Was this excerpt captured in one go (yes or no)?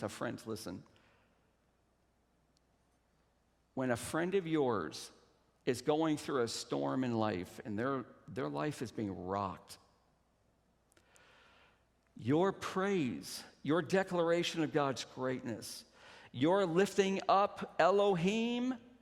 yes